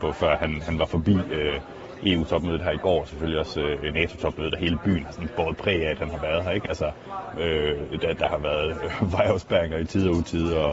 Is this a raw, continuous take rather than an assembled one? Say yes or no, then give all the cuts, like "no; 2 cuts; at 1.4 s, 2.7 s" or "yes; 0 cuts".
yes; 0 cuts